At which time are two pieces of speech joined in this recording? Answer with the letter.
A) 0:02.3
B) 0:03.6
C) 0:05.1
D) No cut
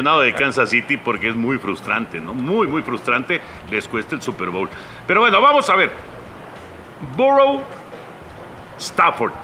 B